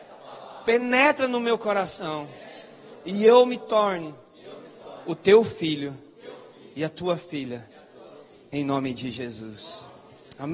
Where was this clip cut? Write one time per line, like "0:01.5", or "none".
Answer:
none